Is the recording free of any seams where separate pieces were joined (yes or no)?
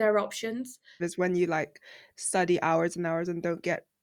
no